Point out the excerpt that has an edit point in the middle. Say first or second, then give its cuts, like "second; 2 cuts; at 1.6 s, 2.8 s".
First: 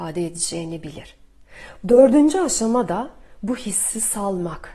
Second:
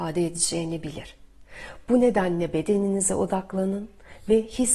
first; 1 cut; at 1.8 s